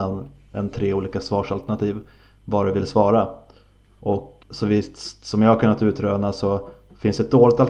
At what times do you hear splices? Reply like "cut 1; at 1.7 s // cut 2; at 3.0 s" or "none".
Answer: cut 1; at 4.4 s